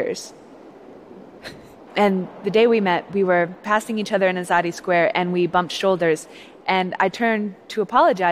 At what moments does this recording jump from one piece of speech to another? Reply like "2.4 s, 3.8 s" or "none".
1.9 s